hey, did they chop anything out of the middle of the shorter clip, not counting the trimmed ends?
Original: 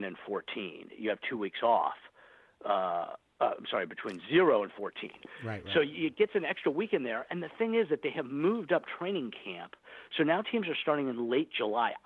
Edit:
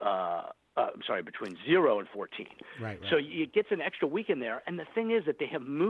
no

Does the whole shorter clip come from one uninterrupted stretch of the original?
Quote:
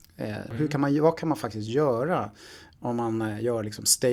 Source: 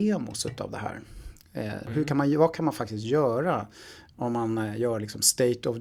yes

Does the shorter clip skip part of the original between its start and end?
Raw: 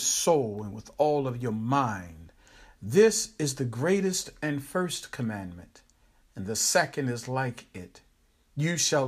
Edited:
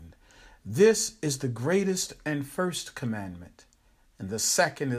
no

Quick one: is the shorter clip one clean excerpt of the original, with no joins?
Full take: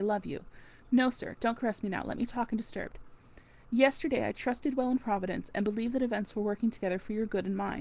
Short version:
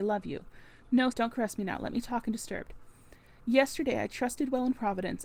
no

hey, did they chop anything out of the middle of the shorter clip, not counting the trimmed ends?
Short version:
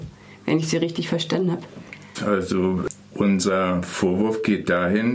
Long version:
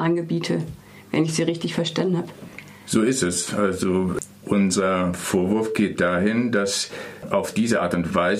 yes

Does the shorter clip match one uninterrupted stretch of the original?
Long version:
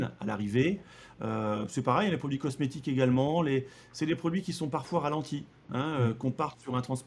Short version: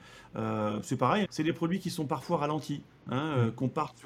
no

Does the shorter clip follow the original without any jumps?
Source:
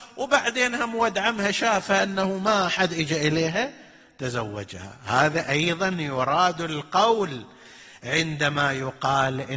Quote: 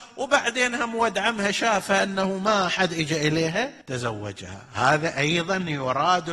no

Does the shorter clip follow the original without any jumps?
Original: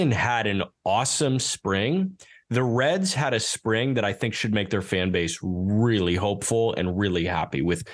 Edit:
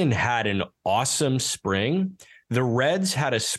yes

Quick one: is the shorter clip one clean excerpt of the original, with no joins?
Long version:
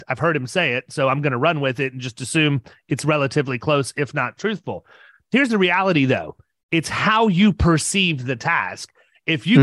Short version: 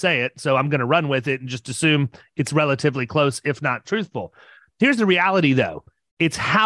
yes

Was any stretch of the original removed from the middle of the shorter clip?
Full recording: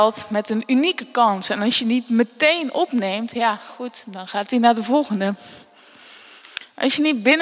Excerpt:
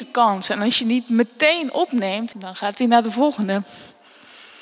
yes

